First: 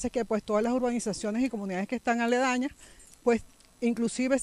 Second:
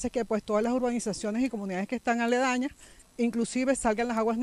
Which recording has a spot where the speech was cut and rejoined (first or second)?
second